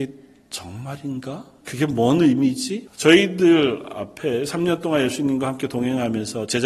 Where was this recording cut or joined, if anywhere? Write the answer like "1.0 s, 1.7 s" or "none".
1.6 s, 2.9 s